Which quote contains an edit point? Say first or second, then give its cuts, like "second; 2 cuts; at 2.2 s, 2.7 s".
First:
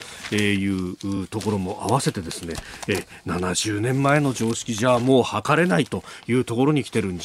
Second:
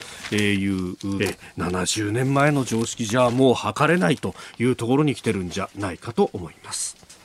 second; 1 cut; at 1.2 s